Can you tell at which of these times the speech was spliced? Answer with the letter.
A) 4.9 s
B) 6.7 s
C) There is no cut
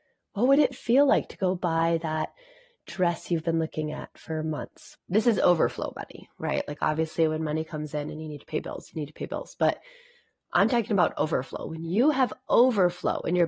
A